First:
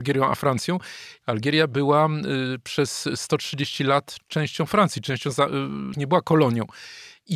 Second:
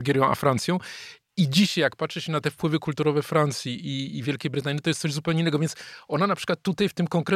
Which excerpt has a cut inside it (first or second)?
first